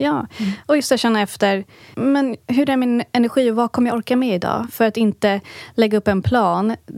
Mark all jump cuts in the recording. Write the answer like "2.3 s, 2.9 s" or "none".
1.9 s